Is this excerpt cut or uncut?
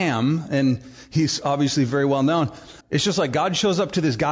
cut